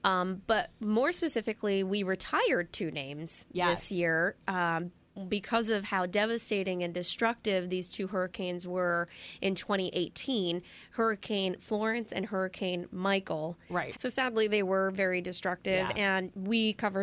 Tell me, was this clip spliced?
yes; 1 cut; at 13.9 s

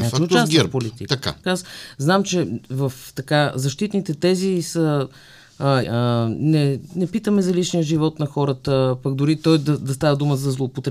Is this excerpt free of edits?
no; 2 cuts; at 1.4 s, 5.8 s

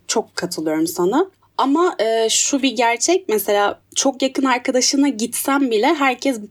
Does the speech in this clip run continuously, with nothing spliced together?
yes; 0 cuts

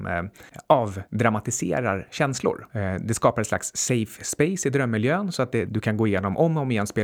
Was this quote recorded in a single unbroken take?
no; 1 cut; at 5.7 s

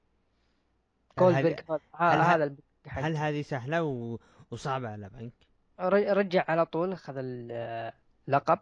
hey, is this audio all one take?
yes; 0 cuts

